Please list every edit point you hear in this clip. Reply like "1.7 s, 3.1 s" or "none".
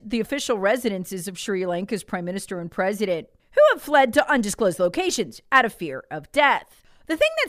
none

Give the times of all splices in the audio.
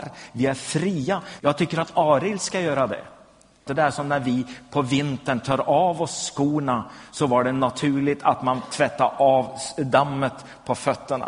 1.4 s, 3.7 s

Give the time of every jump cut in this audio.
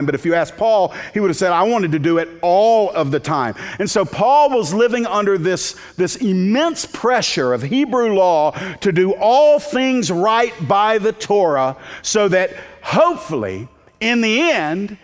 none

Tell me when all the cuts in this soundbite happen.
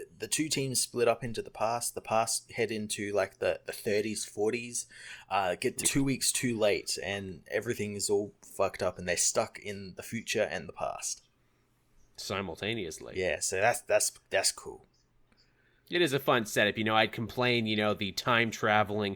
5.8 s

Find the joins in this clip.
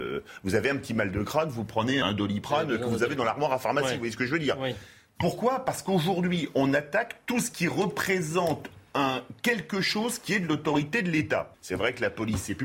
2.0 s, 11.5 s

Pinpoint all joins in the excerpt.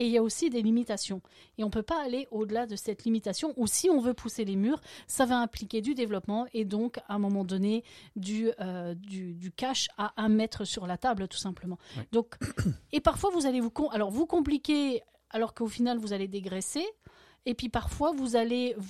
none

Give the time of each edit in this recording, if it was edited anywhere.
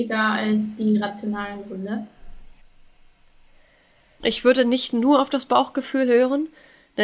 4.2 s

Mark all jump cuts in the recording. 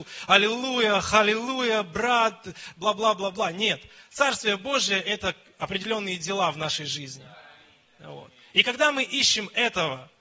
none

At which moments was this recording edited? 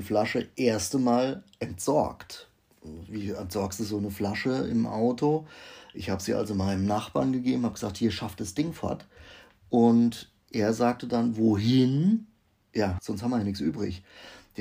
13.0 s

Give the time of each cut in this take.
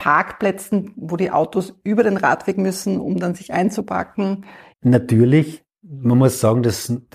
4.7 s

